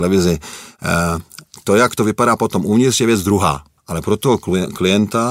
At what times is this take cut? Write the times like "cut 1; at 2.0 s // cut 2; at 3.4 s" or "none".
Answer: none